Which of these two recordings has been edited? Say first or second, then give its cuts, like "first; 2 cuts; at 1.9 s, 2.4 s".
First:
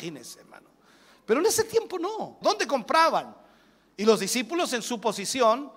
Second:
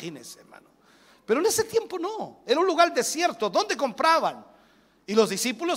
first; 1 cut; at 2.4 s